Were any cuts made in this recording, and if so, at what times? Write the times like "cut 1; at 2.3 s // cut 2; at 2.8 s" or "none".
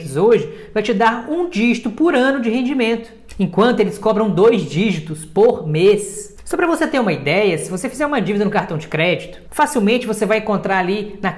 none